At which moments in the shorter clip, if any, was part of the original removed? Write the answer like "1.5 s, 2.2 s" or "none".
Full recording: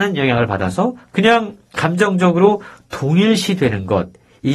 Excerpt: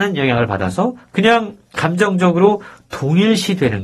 none